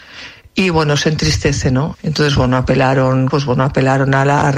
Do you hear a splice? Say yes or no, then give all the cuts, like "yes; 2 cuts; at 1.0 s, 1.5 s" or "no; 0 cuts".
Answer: yes; 2 cuts; at 1.9 s, 3.3 s